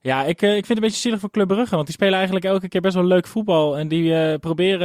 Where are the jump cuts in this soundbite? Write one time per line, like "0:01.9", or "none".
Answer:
none